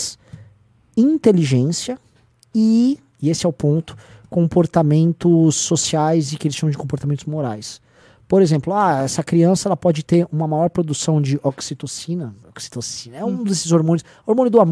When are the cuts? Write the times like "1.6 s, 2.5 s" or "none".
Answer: none